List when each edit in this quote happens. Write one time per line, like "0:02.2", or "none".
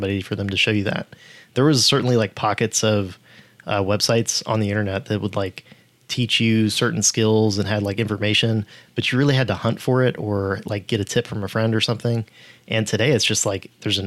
none